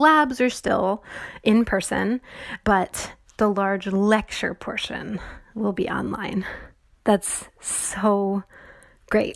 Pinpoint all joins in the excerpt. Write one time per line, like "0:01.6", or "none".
0:02.6